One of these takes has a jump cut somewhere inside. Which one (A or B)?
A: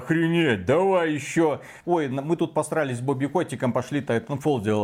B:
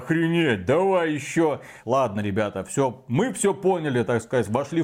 B